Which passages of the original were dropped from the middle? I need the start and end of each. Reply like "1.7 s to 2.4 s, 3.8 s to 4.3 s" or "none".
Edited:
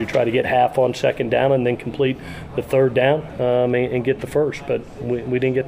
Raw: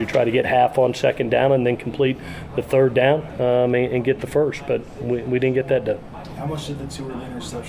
none